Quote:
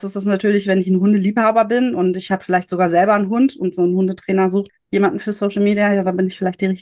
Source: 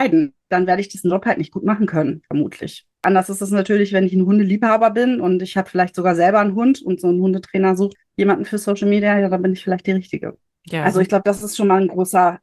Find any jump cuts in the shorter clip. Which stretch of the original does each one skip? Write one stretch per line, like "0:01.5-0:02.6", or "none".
none